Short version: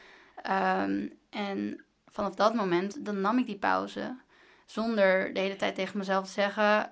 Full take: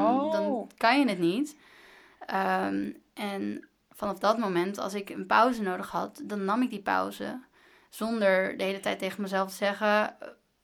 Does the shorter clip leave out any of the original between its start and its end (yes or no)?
yes